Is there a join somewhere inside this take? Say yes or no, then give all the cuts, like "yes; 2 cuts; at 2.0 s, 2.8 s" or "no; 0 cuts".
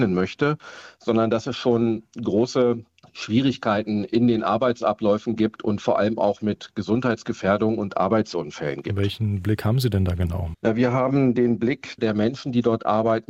yes; 2 cuts; at 10.5 s, 12.0 s